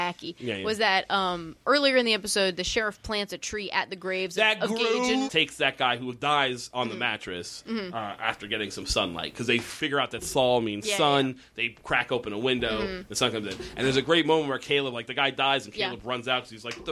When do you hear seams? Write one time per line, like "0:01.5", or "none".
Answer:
0:05.3

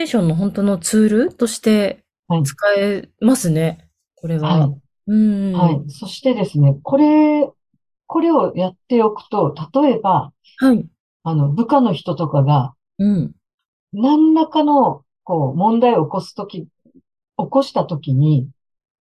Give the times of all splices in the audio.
none

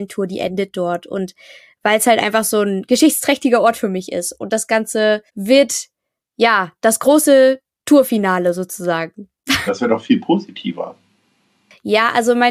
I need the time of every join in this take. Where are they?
0:05.3
0:09.7

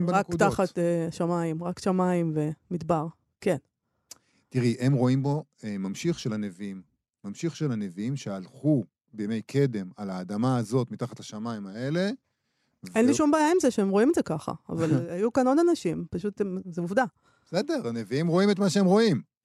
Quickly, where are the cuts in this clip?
none

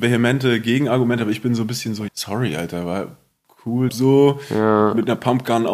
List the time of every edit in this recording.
0:02.1
0:03.9

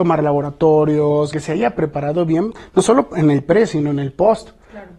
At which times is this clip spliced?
0:01.3

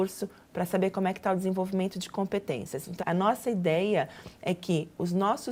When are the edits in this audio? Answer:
0:03.0

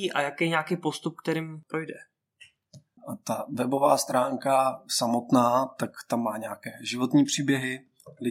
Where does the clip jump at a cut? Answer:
0:03.0

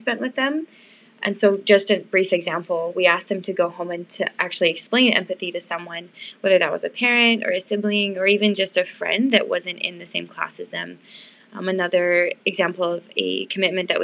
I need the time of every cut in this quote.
none

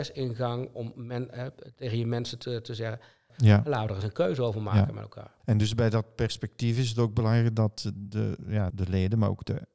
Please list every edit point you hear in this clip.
0:03.3
0:05.4
0:08.7

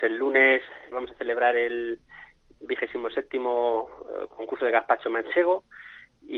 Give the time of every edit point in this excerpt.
0:00.9

